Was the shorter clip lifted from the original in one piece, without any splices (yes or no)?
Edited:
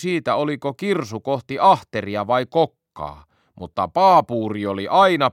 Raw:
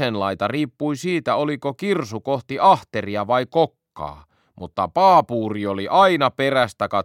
yes